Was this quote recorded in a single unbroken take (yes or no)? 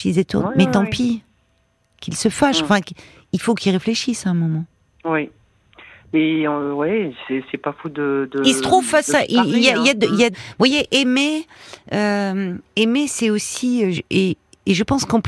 no